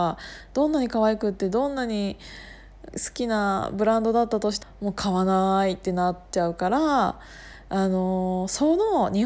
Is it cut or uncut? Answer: cut